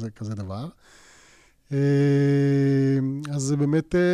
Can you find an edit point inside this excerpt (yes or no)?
no